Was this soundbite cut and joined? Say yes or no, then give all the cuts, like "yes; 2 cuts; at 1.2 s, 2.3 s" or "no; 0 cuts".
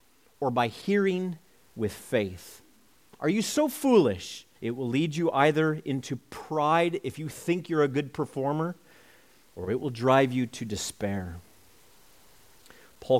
yes; 1 cut; at 4.6 s